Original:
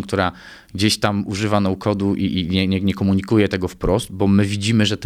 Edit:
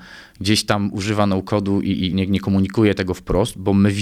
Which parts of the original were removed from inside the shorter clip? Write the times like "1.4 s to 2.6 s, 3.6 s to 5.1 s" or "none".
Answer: 2.5 s to 2.7 s